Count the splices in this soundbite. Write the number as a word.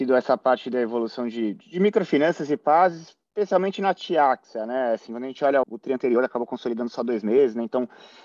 one